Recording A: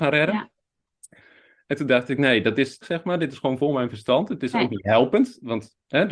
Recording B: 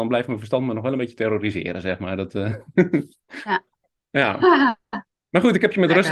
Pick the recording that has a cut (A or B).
A